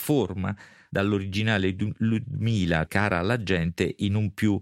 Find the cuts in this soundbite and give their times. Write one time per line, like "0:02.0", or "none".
0:02.9